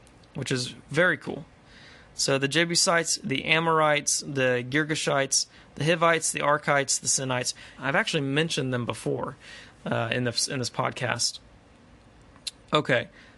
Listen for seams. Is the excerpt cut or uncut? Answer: cut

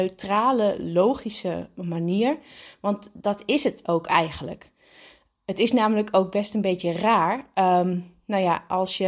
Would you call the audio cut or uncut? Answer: uncut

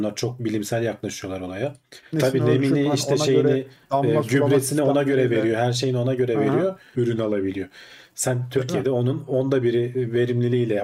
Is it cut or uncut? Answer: cut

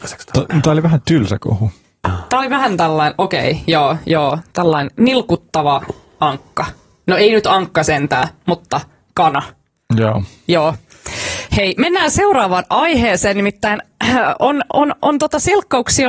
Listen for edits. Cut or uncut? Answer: uncut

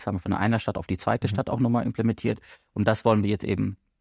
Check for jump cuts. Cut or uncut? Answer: uncut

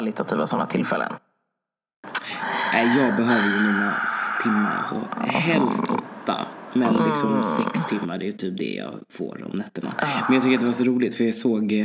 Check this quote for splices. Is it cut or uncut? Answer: uncut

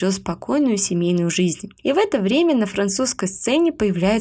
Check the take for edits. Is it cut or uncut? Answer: uncut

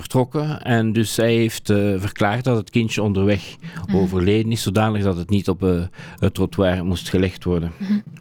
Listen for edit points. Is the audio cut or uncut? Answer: uncut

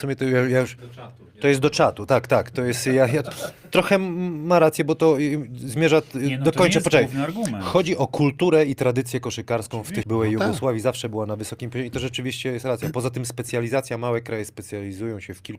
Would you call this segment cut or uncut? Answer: cut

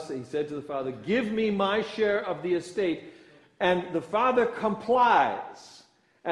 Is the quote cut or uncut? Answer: uncut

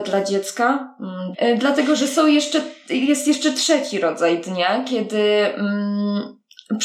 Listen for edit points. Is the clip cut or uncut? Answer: cut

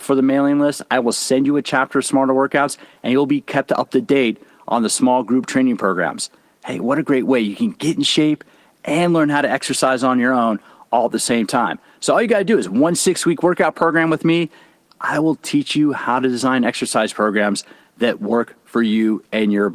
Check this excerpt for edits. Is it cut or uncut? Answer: uncut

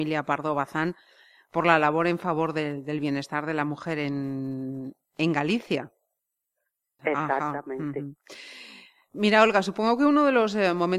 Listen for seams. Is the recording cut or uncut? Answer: cut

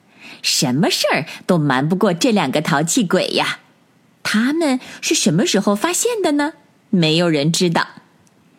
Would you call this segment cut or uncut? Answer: uncut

